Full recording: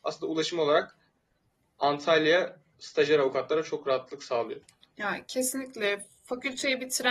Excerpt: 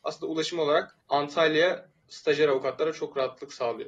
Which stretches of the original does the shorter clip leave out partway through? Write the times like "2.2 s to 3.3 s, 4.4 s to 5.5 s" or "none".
1.0 s to 1.7 s